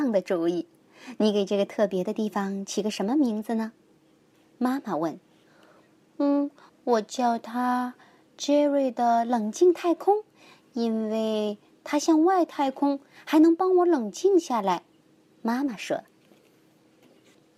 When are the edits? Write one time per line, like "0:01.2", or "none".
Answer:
0:15.0